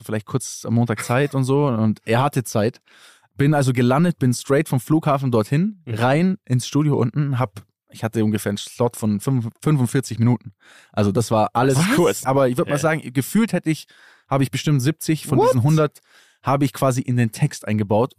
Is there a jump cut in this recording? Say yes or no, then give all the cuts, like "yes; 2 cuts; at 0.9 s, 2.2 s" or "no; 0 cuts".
yes; 1 cut; at 12.2 s